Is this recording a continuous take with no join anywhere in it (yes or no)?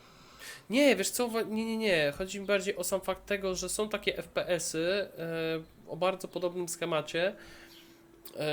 yes